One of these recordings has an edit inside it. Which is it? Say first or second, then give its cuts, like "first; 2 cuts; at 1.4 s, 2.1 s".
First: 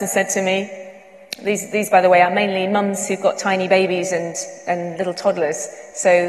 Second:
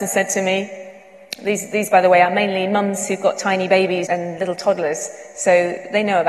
second; 1 cut; at 4.1 s